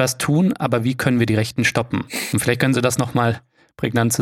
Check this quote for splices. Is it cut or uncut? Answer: cut